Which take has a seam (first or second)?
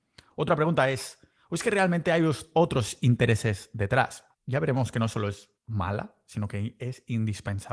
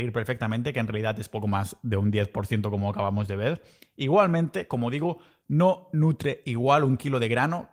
first